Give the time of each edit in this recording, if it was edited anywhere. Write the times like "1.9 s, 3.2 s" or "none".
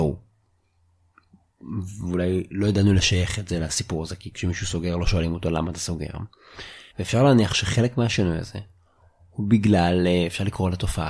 6.9 s